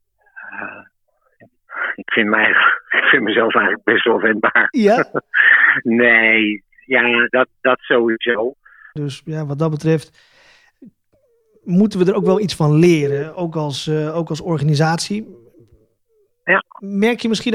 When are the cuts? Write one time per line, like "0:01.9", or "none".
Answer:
0:07.3
0:09.0